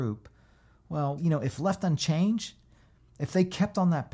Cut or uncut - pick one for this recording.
cut